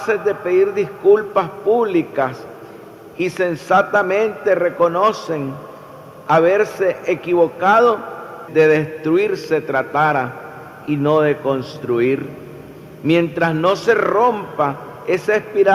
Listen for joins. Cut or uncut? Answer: cut